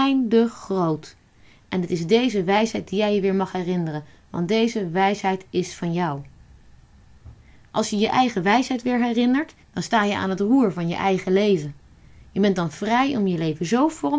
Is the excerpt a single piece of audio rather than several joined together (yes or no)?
no